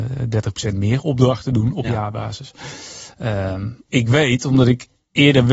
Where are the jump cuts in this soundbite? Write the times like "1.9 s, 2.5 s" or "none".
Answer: 3.9 s